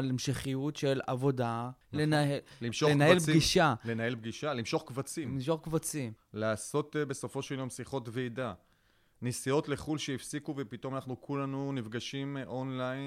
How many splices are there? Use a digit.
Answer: 2